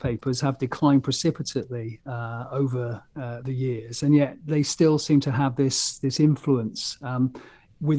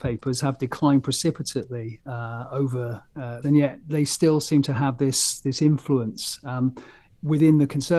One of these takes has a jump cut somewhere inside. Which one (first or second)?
second